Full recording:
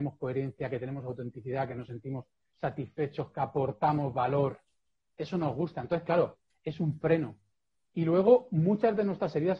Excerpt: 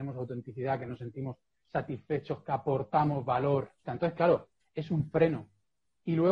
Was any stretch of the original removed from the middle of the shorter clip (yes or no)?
yes